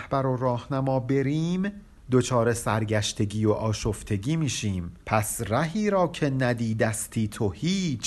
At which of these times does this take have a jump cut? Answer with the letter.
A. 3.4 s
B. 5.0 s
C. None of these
B